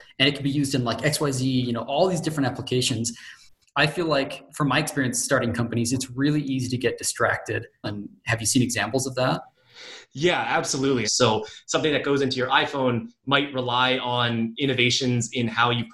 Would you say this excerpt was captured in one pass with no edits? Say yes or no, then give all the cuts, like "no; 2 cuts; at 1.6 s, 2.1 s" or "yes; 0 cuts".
no; 2 cuts; at 7.8 s, 11.0 s